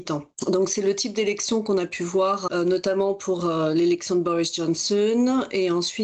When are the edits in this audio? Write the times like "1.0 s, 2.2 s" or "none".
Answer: none